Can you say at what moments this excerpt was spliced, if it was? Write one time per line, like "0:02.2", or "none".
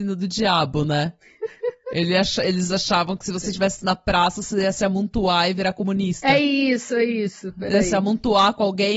none